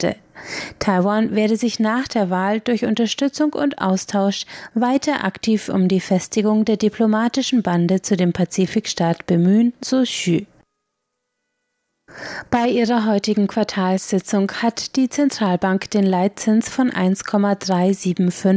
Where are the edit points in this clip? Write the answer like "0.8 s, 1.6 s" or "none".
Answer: none